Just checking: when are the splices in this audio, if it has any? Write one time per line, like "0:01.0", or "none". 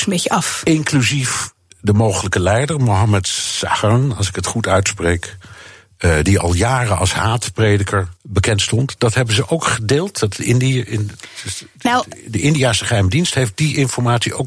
0:08.2